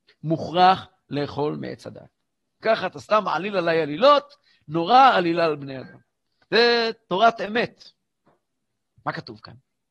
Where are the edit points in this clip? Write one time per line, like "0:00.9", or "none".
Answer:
0:02.6
0:06.4